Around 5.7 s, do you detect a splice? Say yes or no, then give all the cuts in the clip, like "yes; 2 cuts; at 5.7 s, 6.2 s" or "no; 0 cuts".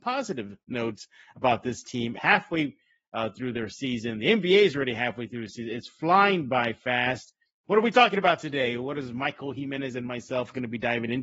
no; 2 cuts; at 2.2 s, 7.6 s